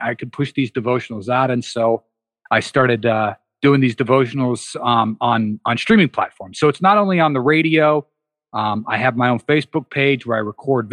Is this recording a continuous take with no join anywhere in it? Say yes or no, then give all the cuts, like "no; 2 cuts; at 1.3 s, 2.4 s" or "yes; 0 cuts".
yes; 0 cuts